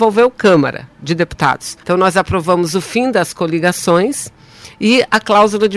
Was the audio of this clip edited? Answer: yes; 1 cut; at 1.8 s

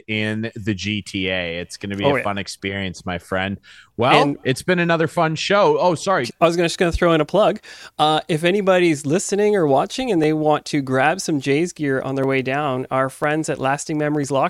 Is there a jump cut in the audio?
yes; 1 cut; at 6.3 s

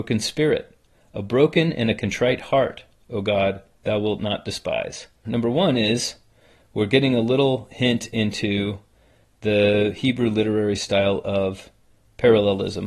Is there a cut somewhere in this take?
yes; 1 cut; at 5.2 s

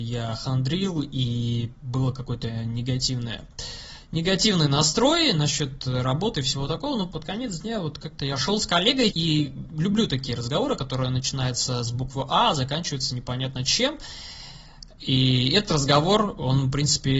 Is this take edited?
yes; 1 cut; at 9.1 s

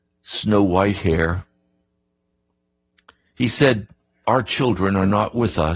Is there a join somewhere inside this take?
yes; 1 cut; at 4.2 s

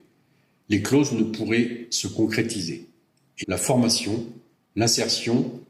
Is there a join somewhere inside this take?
yes; 1 cut; at 3.4 s

